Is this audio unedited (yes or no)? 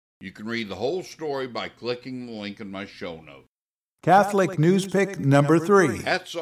yes